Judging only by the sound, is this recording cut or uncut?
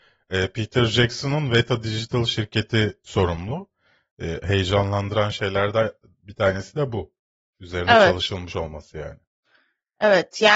uncut